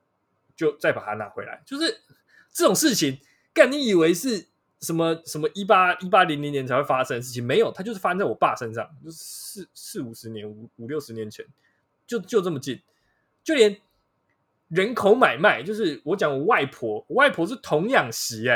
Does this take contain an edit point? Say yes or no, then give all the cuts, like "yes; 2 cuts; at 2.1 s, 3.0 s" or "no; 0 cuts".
no; 0 cuts